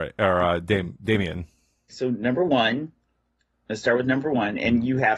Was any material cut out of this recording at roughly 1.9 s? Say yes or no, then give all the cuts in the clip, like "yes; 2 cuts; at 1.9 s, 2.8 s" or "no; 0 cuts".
yes; 1 cut; at 1.9 s